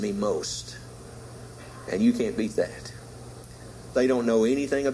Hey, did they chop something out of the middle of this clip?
yes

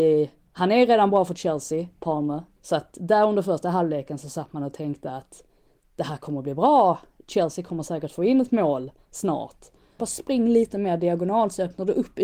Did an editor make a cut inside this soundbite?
yes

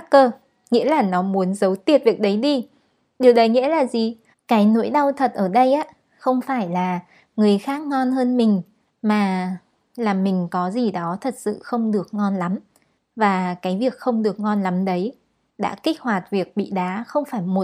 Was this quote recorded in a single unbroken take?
no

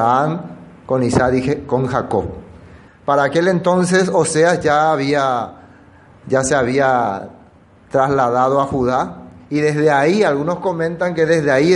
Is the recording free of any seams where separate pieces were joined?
no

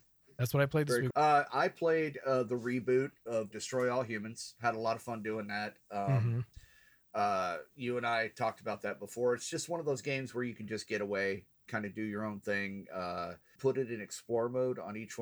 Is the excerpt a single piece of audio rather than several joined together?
no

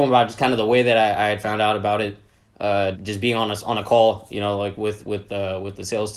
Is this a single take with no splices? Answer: no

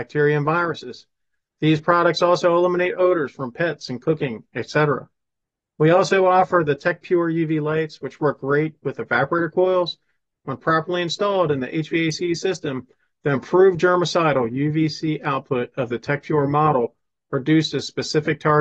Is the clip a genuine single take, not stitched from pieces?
yes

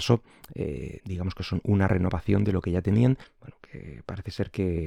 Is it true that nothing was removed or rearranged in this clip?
no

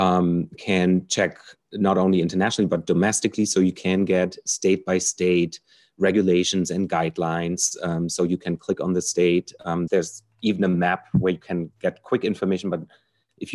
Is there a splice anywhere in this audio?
yes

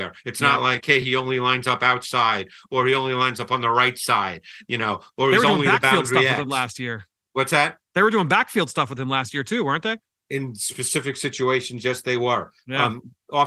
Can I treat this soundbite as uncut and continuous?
yes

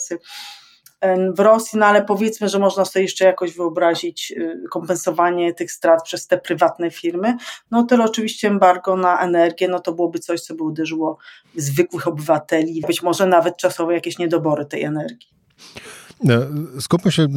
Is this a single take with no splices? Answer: no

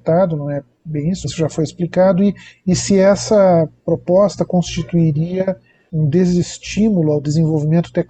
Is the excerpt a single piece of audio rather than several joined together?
no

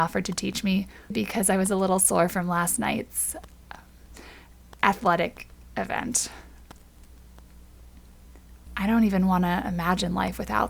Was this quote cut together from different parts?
yes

